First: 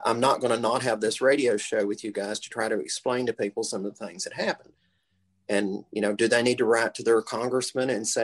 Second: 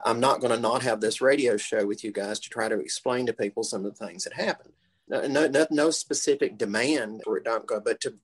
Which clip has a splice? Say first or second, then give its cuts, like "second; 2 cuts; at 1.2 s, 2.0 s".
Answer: second; 2 cuts; at 5.1 s, 7.2 s